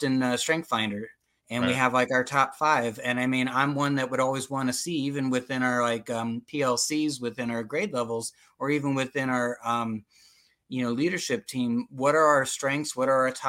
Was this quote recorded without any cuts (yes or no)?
yes